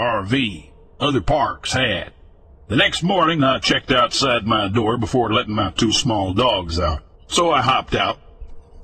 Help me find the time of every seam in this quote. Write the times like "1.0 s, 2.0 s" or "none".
2.6 s, 7.2 s